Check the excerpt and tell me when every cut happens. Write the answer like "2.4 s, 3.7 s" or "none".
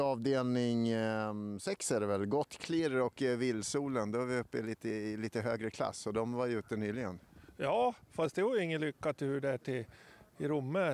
none